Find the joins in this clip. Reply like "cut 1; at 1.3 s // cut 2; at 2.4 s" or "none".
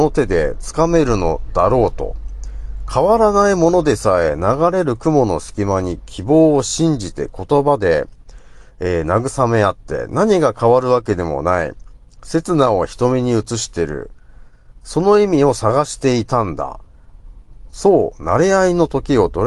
none